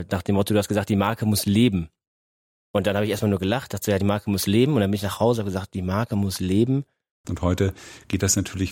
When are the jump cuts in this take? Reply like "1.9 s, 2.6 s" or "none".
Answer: 7.2 s